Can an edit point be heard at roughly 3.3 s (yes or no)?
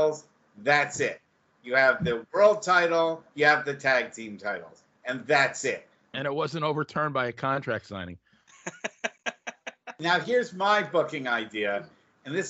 yes